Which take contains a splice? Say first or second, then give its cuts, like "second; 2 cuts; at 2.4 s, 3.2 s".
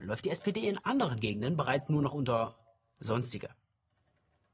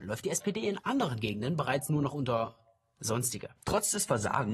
second; 1 cut; at 3.6 s